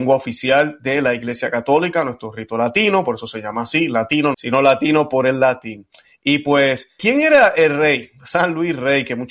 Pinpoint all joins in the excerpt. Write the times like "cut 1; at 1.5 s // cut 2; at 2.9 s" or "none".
cut 1; at 4.3 s // cut 2; at 7.0 s